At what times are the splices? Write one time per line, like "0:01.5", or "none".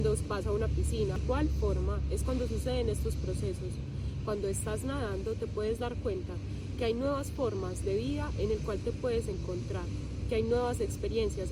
none